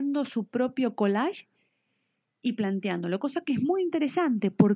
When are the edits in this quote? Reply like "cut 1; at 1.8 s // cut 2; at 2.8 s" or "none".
none